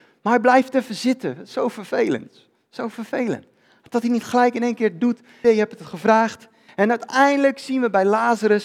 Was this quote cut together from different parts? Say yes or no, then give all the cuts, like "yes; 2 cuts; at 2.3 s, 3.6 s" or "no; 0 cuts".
yes; 2 cuts; at 5.4 s, 6.7 s